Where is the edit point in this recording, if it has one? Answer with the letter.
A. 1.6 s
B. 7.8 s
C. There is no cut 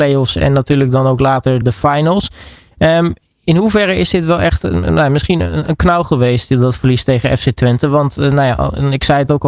A